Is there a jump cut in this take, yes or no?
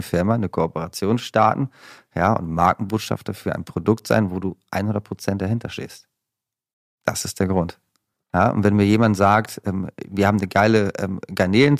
yes